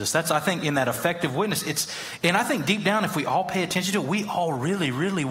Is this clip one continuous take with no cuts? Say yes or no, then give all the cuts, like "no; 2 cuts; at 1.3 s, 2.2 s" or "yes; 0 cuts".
yes; 0 cuts